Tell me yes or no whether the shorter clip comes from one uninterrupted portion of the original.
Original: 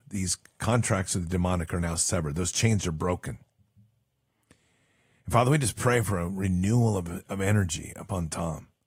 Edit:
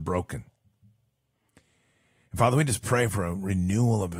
yes